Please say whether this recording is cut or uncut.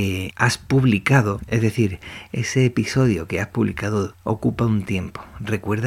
uncut